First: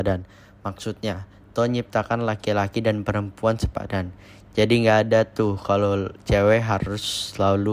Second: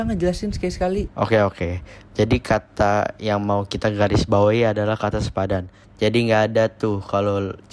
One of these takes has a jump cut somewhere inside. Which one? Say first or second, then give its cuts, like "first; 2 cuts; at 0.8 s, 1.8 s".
second; 2 cuts; at 1.1 s, 5.8 s